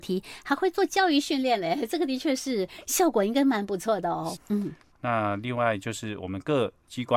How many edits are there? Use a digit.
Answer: 1